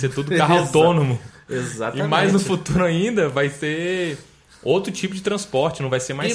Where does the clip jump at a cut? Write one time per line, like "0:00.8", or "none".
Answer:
none